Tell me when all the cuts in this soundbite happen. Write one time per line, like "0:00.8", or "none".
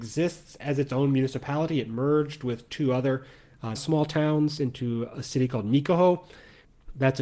0:03.8

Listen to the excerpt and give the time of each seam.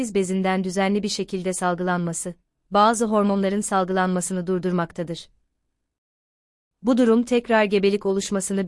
none

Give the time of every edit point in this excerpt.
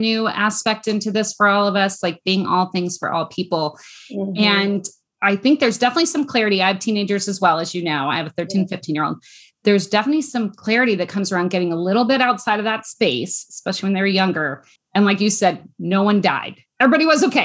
none

